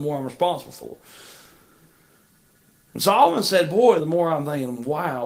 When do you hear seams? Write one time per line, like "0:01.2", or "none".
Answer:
0:04.0